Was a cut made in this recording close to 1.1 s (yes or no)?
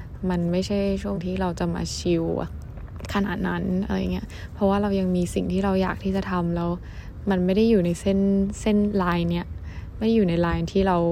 yes